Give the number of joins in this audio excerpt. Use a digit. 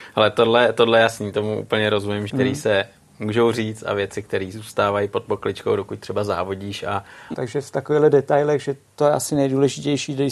2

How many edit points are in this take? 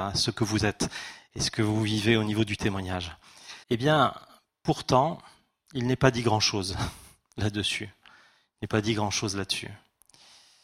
1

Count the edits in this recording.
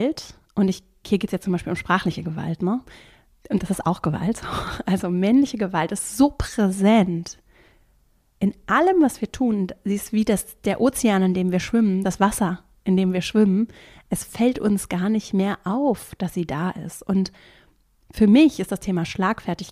0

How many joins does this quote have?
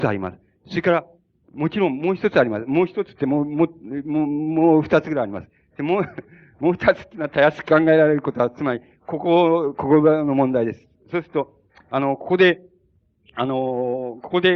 0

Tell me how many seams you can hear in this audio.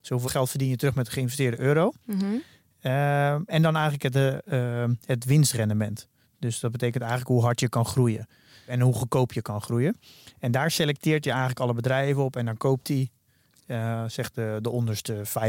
0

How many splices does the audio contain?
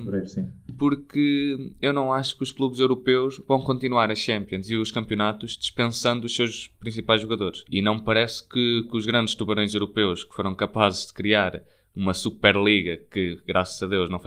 1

